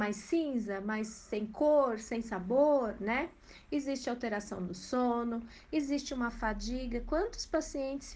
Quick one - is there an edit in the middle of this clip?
no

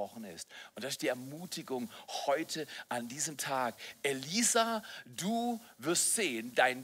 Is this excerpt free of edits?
yes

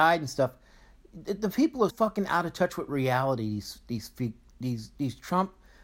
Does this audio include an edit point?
yes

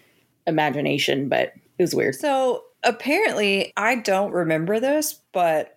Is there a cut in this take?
yes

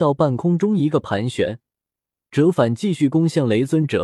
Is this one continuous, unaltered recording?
yes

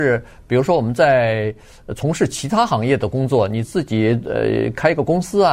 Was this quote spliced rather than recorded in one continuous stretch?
yes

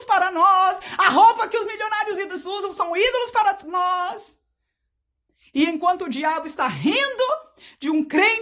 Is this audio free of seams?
yes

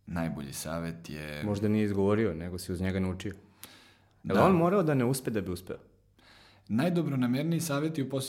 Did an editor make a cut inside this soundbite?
yes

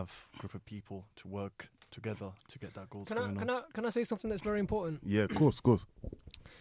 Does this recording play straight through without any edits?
yes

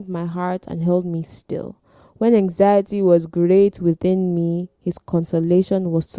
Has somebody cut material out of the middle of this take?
no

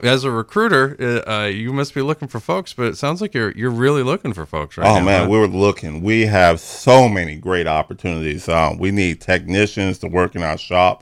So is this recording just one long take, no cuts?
yes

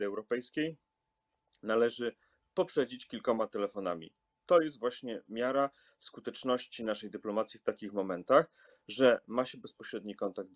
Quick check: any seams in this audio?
no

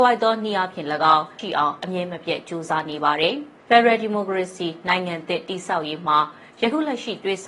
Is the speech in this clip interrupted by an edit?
yes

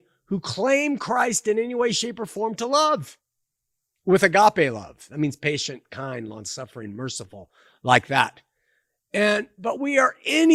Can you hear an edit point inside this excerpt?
no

